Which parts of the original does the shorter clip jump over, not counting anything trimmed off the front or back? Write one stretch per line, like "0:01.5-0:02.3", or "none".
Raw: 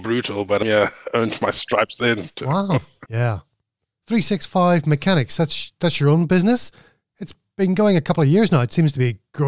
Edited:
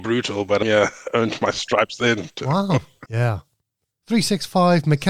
none